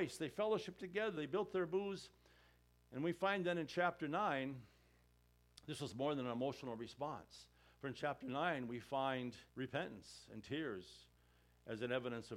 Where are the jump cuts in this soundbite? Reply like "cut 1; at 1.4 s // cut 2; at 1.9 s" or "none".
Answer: cut 1; at 1.2 s // cut 2; at 9.5 s